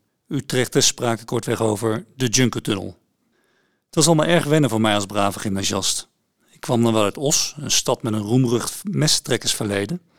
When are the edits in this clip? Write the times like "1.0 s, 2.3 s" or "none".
none